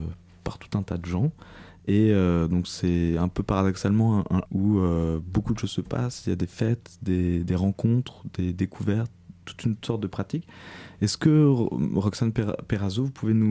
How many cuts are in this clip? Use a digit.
1